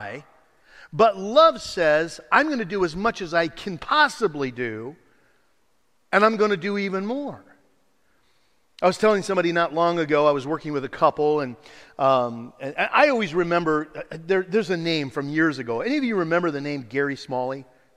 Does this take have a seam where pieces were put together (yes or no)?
no